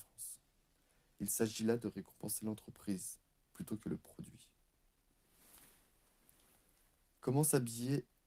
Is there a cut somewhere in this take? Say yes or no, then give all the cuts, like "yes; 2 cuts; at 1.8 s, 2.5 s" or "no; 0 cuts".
no; 0 cuts